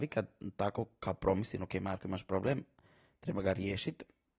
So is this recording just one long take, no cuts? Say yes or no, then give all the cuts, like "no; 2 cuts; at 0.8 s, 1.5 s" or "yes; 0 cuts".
yes; 0 cuts